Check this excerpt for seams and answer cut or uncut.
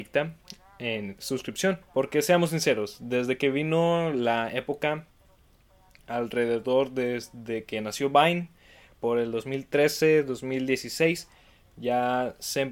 cut